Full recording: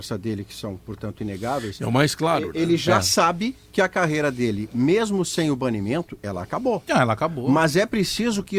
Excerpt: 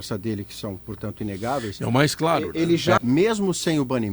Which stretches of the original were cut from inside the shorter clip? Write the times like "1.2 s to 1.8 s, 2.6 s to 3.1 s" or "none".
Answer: 3.0 s to 4.7 s